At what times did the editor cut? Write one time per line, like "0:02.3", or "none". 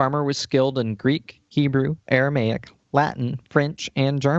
none